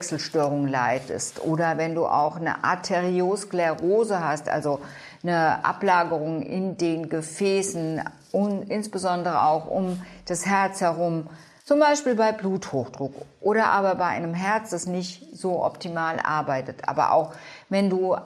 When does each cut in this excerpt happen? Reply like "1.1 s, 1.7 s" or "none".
11.6 s

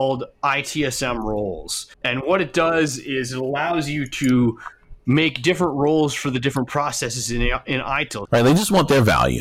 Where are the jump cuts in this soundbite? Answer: 1.9 s, 8.3 s

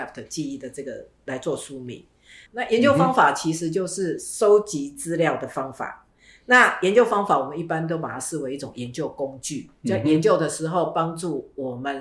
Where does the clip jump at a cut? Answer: 2.5 s

